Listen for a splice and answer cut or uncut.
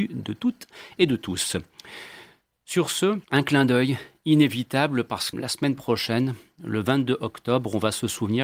cut